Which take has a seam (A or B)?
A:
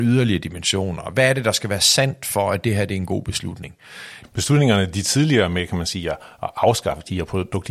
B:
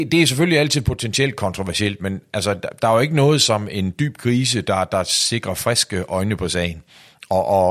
A